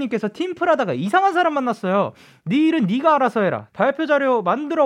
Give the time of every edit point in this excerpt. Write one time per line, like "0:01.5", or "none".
0:03.7